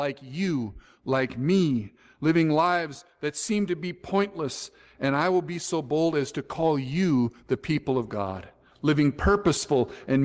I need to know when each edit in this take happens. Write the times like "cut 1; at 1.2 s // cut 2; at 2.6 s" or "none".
none